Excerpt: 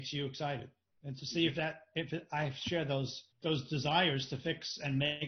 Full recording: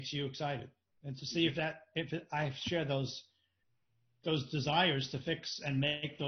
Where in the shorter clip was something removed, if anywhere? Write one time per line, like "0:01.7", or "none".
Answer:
0:03.3